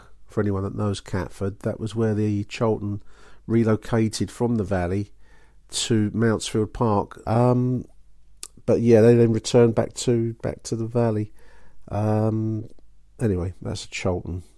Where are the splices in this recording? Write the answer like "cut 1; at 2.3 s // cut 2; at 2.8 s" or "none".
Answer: cut 1; at 7.2 s

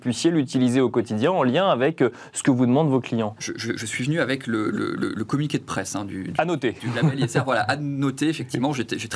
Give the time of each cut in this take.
cut 1; at 3.4 s

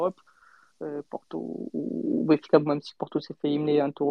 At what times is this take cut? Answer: cut 1; at 1.0 s

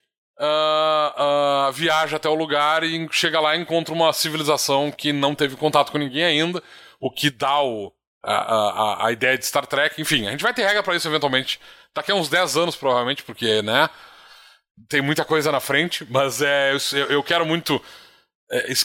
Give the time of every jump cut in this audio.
none

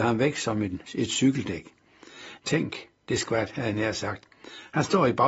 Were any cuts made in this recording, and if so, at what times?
cut 1; at 2.4 s

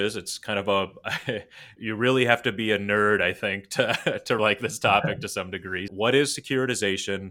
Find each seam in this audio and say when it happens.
cut 1; at 1.8 s // cut 2; at 4.4 s // cut 3; at 5.9 s

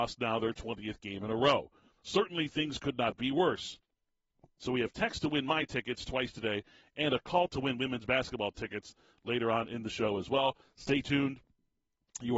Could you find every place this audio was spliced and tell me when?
cut 1; at 4.6 s

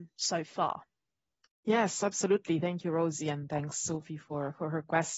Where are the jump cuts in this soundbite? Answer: none

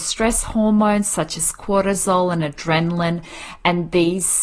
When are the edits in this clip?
none

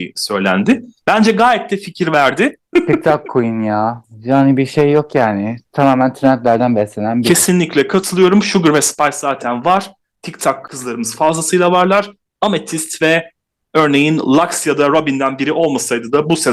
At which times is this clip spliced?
cut 1; at 2.7 s

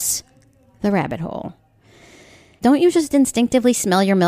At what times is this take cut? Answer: cut 1; at 2.6 s

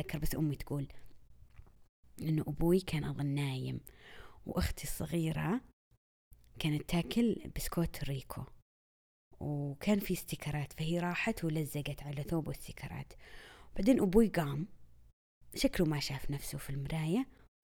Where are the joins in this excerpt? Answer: none

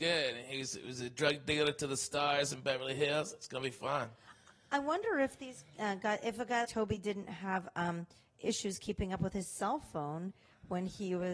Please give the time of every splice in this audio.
cut 1; at 6.6 s

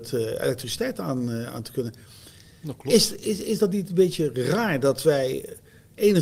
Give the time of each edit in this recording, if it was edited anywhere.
none

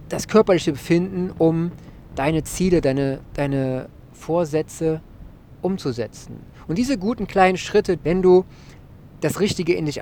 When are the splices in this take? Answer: cut 1; at 6.7 s // cut 2; at 8.0 s

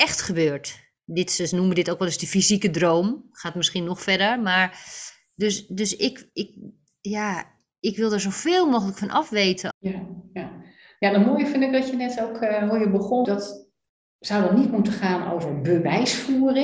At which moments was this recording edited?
cut 1; at 9.7 s // cut 2; at 13.2 s

